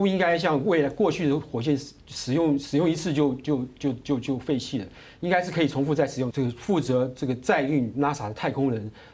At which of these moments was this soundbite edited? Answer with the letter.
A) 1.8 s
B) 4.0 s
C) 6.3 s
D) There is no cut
C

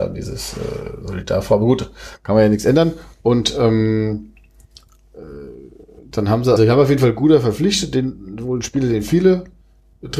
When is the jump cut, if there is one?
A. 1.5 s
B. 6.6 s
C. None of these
B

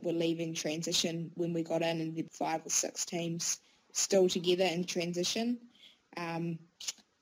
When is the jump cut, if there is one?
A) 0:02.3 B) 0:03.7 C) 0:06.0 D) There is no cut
A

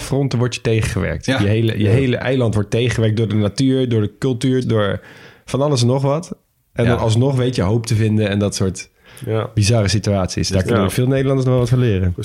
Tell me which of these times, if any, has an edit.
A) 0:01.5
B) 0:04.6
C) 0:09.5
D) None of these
B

